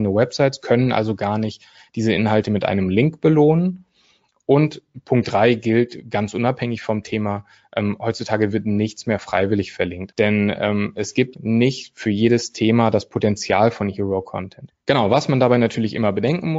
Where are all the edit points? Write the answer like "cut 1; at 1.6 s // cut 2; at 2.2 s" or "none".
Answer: cut 1; at 10.1 s // cut 2; at 11.3 s // cut 3; at 14.7 s